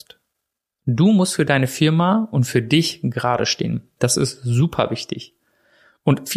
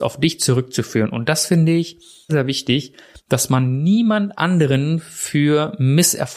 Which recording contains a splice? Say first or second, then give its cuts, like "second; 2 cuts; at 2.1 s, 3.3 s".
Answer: second; 1 cut; at 2.3 s